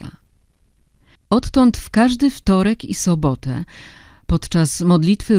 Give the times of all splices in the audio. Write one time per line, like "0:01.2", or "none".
0:01.2